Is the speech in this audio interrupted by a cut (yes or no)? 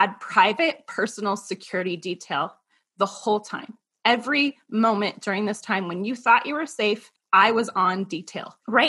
yes